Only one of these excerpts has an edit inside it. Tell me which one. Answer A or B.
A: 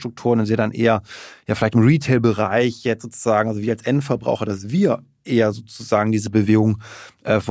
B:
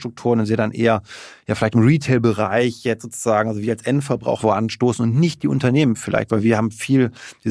B